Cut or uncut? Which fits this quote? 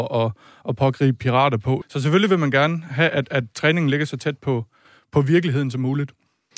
cut